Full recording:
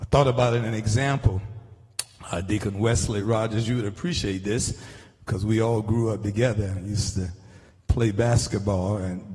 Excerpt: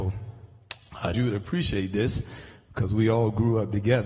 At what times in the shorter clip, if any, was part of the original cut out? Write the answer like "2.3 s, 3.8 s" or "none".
1.1 s